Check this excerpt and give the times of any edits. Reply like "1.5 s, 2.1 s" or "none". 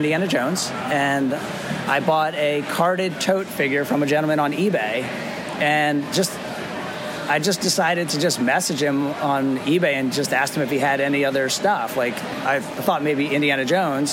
none